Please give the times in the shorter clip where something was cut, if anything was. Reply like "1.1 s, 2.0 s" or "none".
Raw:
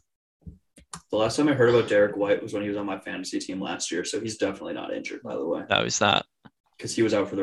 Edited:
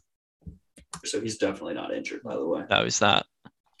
1.0 s